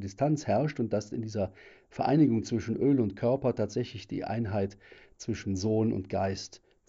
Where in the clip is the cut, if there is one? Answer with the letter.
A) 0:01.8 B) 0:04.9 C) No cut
C